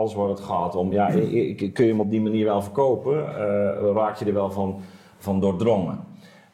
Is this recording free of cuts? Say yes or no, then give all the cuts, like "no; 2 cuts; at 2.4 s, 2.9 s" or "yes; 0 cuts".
yes; 0 cuts